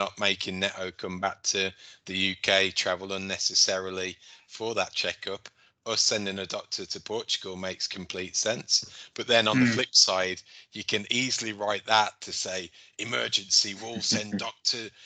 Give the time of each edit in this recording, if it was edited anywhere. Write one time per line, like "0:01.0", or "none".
none

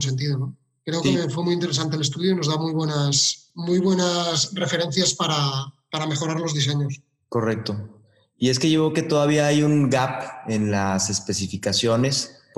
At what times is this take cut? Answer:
none

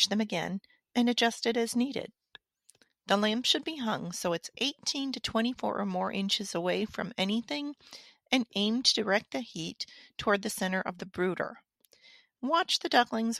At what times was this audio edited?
none

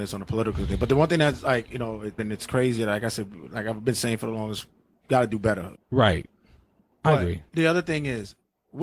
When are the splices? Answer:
0:02.2
0:05.8

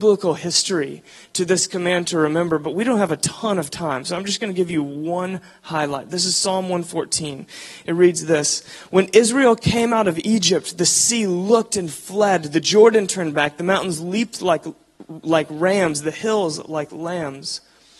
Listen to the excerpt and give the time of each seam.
none

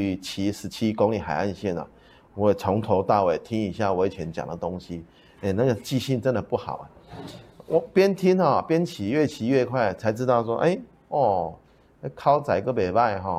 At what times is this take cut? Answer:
none

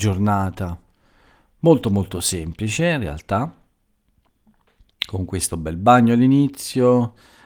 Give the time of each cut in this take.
none

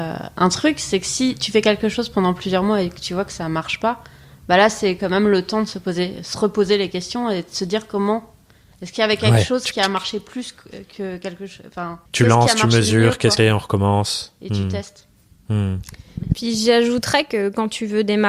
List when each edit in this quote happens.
0:12.1
0:13.4

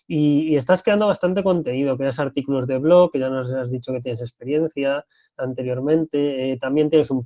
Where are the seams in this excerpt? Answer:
none

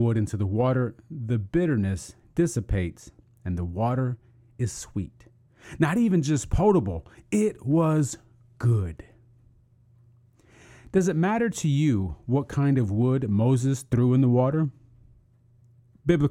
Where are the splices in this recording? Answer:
none

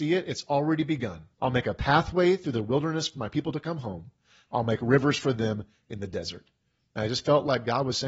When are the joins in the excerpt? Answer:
0:01.3

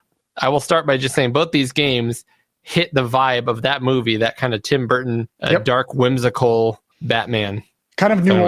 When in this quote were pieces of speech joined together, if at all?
0:05.3
0:06.9

